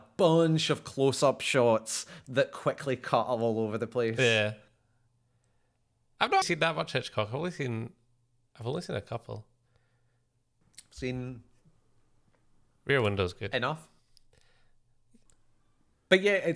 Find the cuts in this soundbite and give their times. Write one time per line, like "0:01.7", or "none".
0:06.4